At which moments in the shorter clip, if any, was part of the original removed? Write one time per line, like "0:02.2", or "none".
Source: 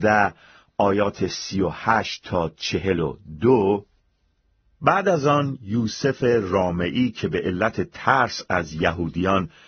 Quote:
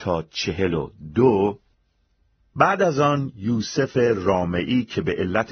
none